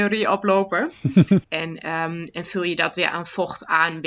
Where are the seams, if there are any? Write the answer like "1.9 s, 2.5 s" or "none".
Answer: 1.4 s